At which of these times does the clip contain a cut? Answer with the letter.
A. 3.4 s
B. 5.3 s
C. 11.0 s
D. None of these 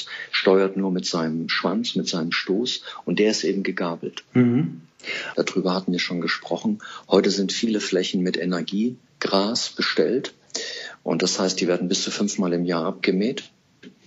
B